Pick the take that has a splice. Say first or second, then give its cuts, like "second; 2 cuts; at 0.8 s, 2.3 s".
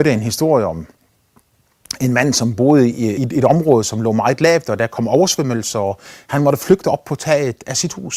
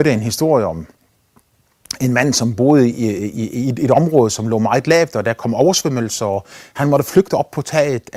first; 1 cut; at 3.2 s